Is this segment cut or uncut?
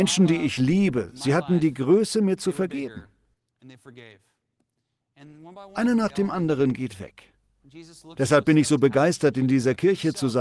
cut